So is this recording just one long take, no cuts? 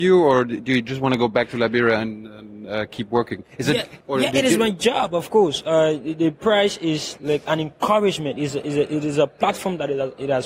no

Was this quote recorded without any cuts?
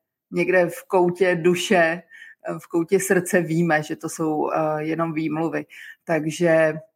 yes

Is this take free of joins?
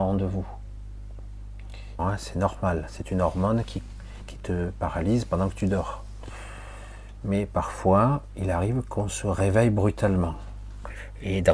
no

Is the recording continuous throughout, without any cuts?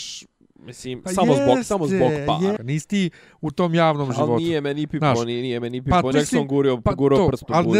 no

